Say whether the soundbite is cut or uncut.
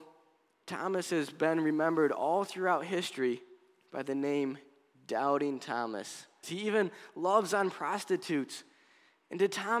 cut